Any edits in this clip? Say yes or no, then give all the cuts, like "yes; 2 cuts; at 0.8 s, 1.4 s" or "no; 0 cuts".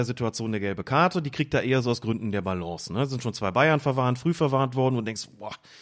no; 0 cuts